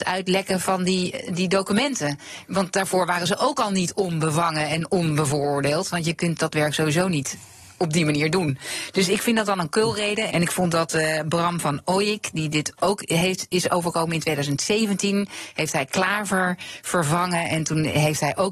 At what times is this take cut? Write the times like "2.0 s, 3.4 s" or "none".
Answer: 10.3 s